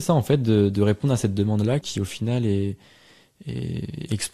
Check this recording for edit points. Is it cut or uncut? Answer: cut